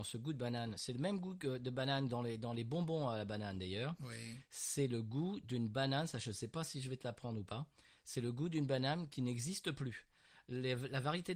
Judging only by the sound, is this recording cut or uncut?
uncut